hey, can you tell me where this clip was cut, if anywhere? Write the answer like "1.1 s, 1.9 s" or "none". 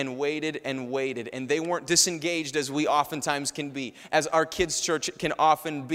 none